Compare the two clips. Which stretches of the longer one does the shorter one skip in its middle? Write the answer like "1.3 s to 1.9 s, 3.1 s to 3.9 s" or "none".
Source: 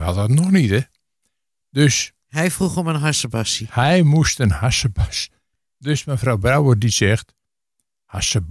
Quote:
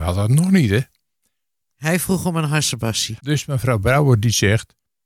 1.7 s to 2.2 s, 3.7 s to 5.8 s